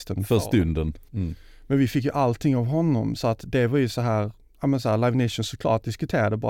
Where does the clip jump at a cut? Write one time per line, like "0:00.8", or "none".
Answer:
0:01.1